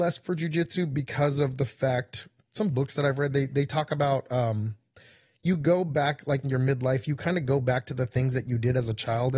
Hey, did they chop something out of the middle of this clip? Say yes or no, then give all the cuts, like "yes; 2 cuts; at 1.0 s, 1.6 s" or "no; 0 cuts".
yes; 1 cut; at 6.4 s